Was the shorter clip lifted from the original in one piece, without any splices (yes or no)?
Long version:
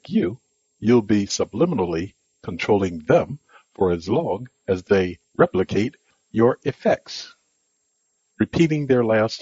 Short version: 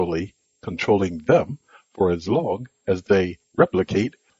yes